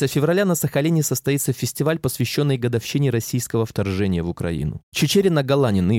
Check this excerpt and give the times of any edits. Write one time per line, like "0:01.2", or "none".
0:04.8